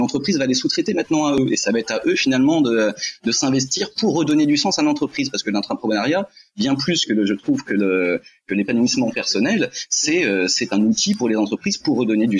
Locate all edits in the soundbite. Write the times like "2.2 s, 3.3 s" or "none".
none